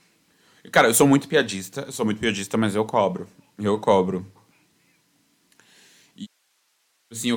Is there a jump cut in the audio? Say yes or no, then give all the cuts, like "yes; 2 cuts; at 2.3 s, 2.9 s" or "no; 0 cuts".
no; 0 cuts